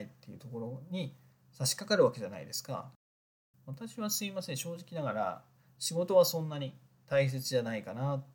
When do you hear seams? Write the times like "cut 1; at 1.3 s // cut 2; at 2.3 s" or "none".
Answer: cut 1; at 3.5 s